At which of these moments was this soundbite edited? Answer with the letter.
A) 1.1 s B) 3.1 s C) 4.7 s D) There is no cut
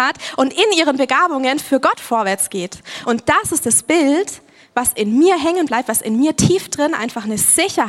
D